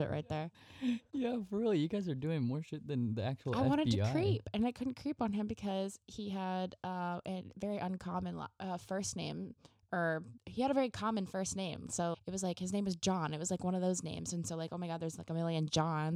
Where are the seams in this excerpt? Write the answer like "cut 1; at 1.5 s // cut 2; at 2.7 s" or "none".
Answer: cut 1; at 12.1 s